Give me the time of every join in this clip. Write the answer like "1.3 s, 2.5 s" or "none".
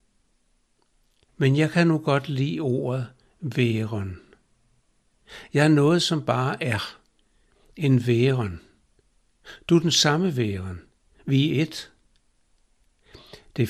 1.3 s